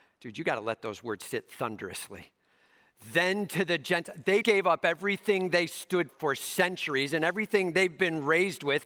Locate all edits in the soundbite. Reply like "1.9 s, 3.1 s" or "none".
4.4 s, 6.1 s